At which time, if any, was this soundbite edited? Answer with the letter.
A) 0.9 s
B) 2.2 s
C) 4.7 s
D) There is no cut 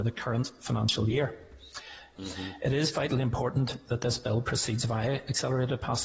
B